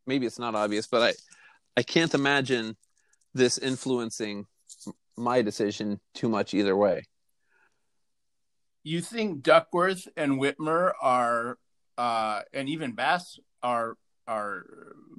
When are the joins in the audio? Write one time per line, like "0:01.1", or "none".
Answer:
none